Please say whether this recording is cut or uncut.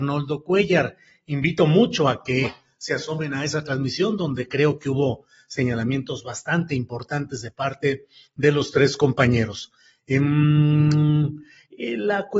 uncut